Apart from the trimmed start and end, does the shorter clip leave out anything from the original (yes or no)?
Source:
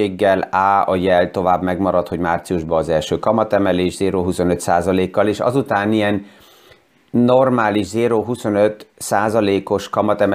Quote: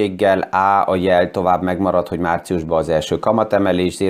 no